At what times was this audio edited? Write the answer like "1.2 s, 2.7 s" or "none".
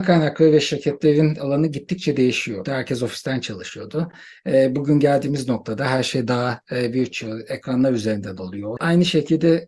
2.6 s, 8.8 s